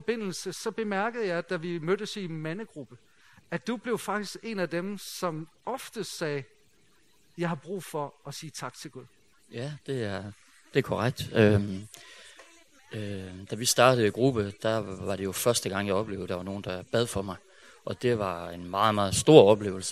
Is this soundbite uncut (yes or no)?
yes